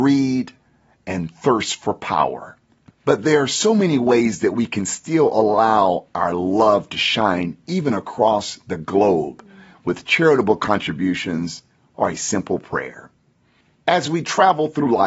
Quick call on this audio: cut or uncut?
cut